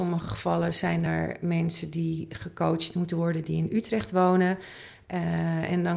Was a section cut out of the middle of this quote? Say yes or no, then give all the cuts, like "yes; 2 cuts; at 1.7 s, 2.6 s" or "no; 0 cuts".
no; 0 cuts